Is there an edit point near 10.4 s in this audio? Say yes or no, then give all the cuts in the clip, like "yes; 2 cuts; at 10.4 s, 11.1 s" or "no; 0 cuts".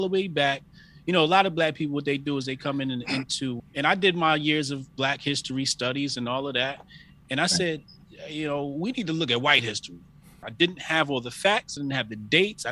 yes; 3 cuts; at 3.6 s, 10.4 s, 11.8 s